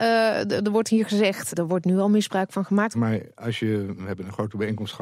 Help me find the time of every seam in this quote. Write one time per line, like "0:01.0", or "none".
0:01.5
0:02.9